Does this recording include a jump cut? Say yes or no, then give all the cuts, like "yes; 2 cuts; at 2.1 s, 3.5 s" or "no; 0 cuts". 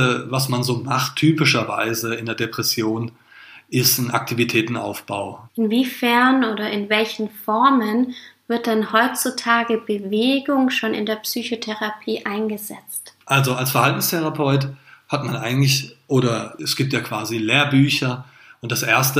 yes; 2 cuts; at 5.5 s, 13.2 s